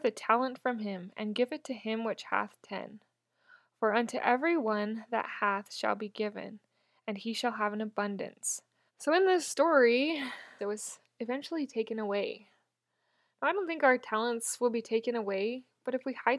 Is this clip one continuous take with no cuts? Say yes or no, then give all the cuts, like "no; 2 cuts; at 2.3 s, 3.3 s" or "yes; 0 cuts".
no; 2 cuts; at 8.9 s, 10.6 s